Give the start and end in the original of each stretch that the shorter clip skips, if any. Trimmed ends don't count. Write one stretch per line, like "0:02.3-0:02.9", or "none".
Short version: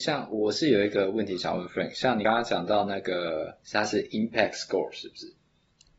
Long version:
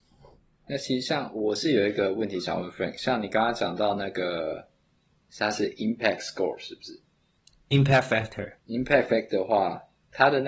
0:03.3-0:03.3
0:04.7-0:05.3